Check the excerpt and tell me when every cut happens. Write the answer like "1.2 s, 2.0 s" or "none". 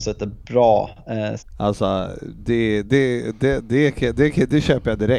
1.4 s